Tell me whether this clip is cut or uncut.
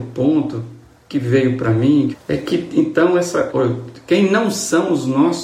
cut